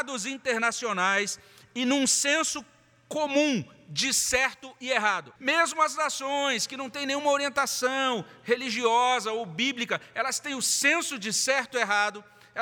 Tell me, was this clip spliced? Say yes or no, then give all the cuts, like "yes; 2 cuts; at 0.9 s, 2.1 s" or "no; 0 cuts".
yes; 1 cut; at 5.4 s